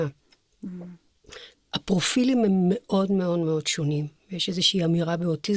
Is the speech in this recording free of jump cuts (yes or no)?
no